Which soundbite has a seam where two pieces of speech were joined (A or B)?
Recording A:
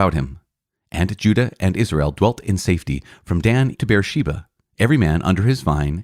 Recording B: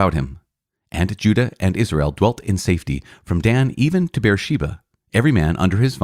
A